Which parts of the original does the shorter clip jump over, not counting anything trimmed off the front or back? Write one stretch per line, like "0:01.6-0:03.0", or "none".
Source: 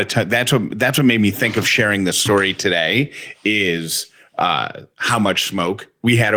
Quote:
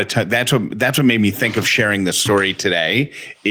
none